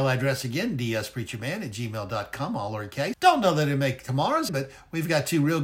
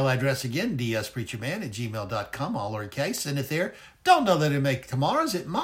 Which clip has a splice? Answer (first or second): first